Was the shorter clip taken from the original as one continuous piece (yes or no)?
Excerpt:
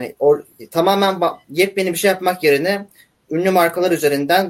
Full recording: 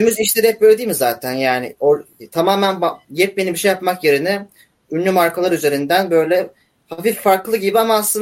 yes